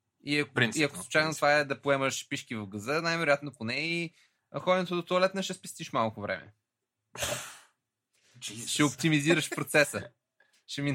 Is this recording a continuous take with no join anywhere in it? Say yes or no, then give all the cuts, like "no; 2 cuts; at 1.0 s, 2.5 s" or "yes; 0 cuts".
yes; 0 cuts